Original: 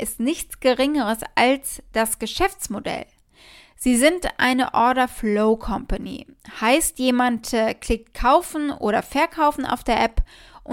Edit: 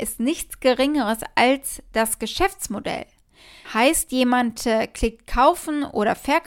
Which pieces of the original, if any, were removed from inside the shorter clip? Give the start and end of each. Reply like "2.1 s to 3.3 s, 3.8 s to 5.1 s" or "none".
3.6 s to 6.5 s